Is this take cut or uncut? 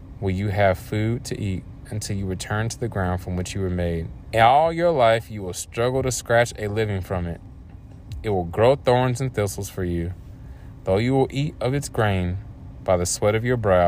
cut